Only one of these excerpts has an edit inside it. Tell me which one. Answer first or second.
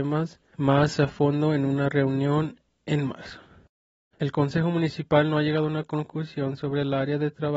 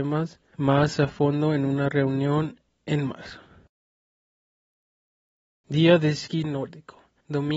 first